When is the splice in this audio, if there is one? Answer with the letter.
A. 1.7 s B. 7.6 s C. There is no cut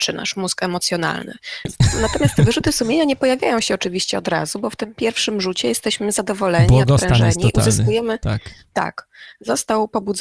A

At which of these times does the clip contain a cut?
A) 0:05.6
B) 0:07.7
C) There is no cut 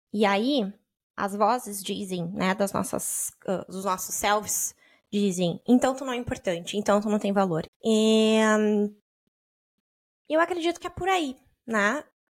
B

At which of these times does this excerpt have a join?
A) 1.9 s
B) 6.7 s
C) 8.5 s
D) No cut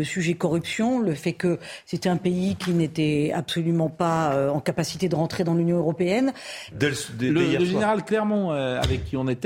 B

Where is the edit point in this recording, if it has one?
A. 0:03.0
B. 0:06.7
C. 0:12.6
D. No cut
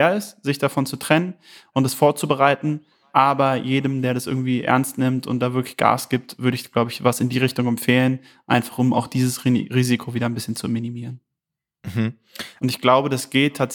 C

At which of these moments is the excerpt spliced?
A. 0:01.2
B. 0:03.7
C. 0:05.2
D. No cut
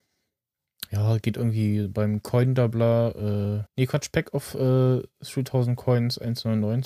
B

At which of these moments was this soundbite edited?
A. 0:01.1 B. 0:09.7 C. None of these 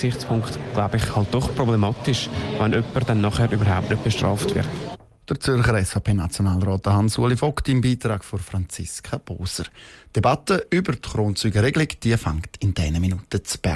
C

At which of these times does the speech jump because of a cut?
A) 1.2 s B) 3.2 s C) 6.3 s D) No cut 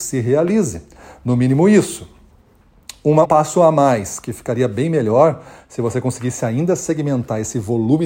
B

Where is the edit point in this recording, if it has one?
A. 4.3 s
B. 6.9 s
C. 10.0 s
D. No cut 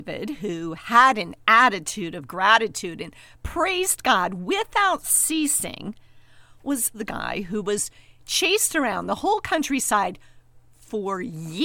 B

